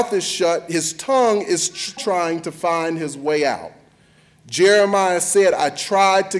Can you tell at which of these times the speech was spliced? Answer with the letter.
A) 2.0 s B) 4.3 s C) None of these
A